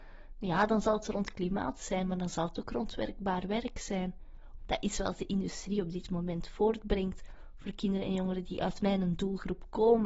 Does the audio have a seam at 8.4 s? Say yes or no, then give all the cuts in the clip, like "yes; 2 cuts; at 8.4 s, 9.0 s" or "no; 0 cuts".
yes; 2 cuts; at 4.6 s, 8.4 s